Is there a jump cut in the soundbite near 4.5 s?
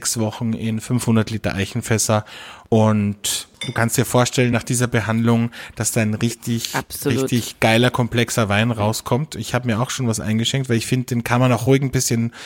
no; 0 cuts

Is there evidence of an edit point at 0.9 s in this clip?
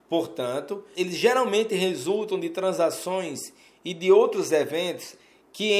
yes; 1 cut; at 0.9 s

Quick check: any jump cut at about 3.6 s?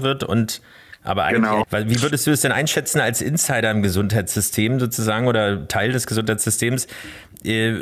no; 1 cut; at 1.6 s

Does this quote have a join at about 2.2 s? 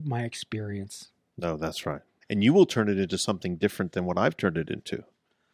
yes; 1 cut; at 2.2 s

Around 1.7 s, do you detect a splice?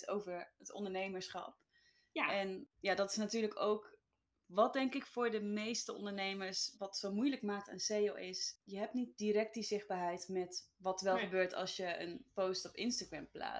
no; 1 cut; at 6.7 s

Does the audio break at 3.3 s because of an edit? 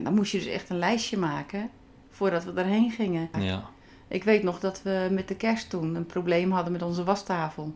yes; 1 cut; at 3.3 s

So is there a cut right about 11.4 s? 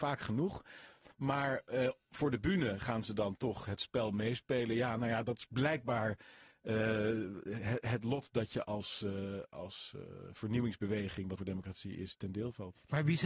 yes; 1 cut; at 11.4 s

